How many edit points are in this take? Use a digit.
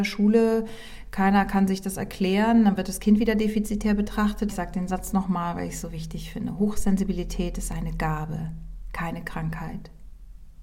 1